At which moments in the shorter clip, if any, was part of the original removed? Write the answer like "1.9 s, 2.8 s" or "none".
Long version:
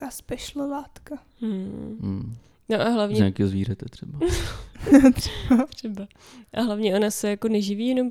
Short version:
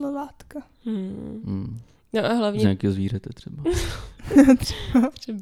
none